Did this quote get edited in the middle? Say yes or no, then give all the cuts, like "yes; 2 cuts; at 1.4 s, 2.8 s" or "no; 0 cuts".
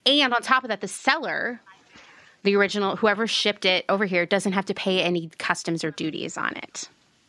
no; 0 cuts